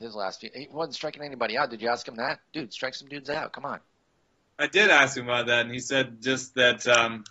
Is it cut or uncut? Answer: uncut